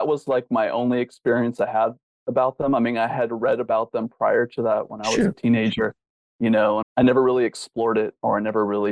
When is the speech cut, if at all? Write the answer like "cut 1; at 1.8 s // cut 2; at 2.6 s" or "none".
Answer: cut 1; at 6.8 s